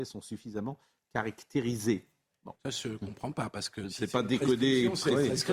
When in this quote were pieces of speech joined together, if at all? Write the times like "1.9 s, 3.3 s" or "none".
2.6 s